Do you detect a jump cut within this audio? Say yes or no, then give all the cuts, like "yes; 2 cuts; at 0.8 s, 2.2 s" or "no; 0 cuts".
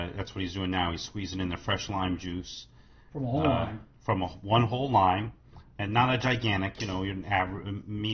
no; 0 cuts